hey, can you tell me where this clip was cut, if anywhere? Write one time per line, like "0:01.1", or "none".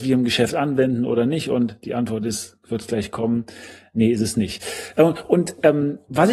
none